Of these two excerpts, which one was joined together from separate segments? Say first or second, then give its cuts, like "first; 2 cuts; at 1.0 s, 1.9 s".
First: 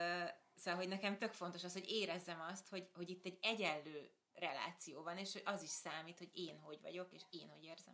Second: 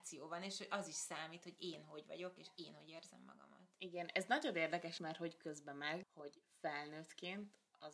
second; 2 cuts; at 5.0 s, 6.0 s